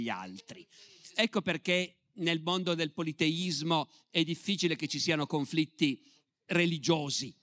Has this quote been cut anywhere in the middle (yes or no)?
no